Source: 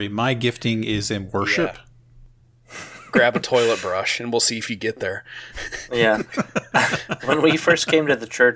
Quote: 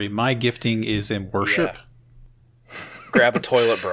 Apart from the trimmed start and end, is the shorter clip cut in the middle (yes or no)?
no